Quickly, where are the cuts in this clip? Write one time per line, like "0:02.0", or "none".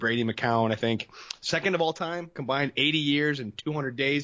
0:02.3